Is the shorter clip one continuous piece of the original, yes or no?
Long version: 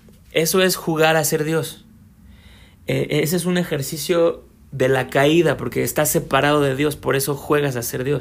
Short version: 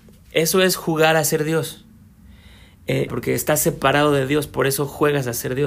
no